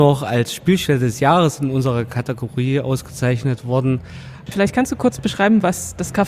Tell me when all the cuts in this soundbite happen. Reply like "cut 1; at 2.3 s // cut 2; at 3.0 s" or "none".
cut 1; at 4.5 s